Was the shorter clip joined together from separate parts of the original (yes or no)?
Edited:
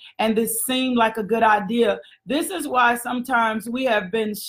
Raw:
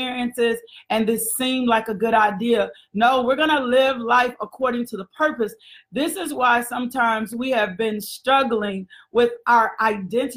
yes